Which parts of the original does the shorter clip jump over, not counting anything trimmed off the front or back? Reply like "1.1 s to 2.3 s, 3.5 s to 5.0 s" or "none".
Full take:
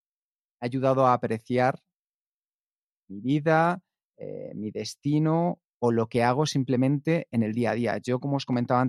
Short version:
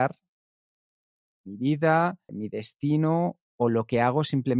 3.9 s to 4.5 s

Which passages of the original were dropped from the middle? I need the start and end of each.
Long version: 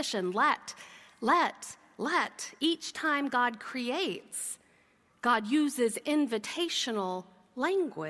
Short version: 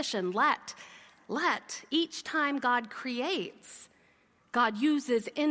1.2 s to 1.9 s

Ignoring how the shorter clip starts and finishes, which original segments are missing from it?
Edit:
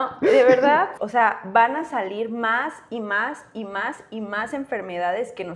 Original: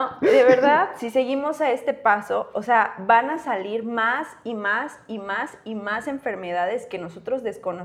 1.0 s to 2.5 s

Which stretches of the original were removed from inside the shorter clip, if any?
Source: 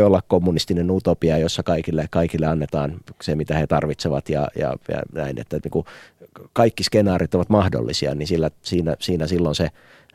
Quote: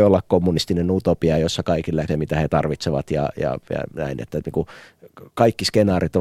2.1 s to 3.3 s

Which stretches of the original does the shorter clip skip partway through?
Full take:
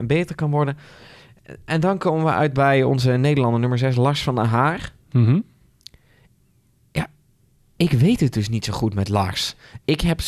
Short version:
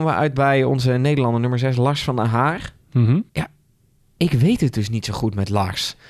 5.5 s to 6.9 s

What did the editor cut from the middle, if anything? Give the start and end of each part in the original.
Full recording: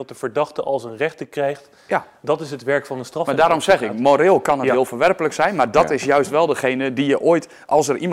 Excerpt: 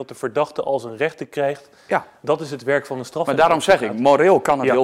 none

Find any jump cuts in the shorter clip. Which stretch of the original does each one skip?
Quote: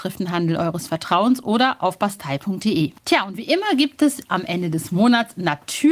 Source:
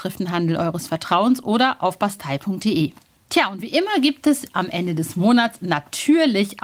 3.0 s to 3.2 s

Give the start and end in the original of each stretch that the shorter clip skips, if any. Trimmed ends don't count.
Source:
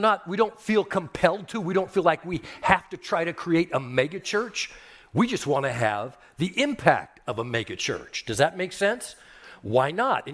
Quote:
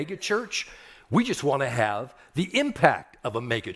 none

